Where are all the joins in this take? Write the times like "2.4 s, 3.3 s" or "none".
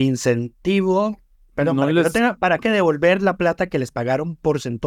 2.6 s